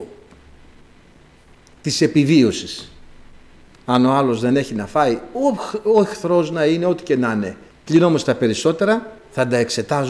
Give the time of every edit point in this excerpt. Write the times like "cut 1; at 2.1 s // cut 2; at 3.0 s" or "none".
cut 1; at 7.7 s